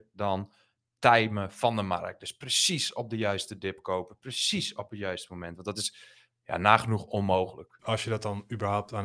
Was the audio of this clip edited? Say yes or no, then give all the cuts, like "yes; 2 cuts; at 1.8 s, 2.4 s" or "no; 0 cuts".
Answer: yes; 1 cut; at 7.8 s